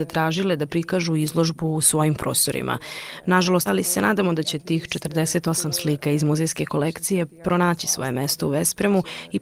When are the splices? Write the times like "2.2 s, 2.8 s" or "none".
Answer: 3.7 s